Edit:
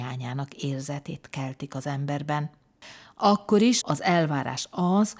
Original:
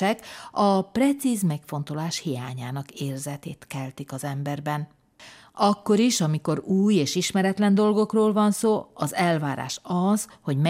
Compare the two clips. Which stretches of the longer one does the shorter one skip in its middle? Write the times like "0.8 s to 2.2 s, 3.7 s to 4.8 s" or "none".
6.2 s to 8.9 s